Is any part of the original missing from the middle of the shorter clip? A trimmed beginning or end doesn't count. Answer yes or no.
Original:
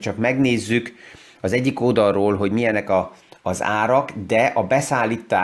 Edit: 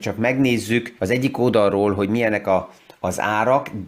yes